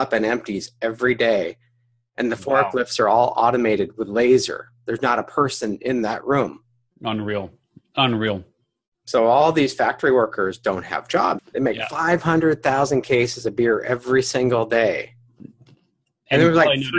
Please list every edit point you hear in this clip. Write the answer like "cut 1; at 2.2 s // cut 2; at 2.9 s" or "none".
cut 1; at 11.4 s